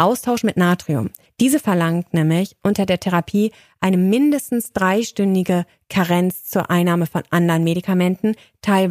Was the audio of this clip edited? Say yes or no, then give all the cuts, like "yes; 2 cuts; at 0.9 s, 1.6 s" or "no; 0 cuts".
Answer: yes; 1 cut; at 1.3 s